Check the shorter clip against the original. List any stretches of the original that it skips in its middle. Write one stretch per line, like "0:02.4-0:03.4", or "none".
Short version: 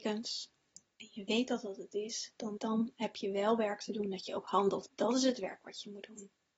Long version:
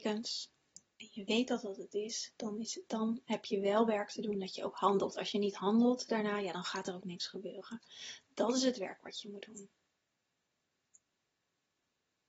0:02.6-0:02.9
0:05.1-0:08.2